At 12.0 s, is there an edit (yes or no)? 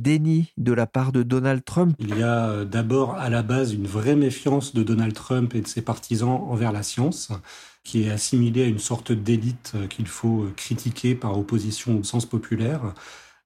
yes